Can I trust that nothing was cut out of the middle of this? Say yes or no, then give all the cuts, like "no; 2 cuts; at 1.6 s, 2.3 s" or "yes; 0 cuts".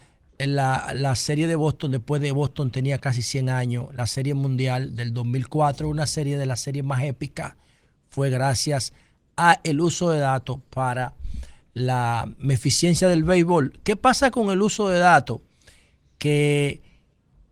yes; 0 cuts